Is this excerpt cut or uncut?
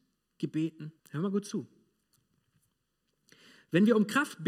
cut